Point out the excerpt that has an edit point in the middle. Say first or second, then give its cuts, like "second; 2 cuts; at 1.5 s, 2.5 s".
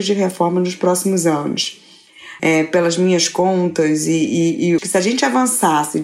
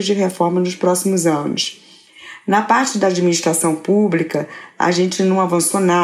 first; 2 cuts; at 2.4 s, 4.8 s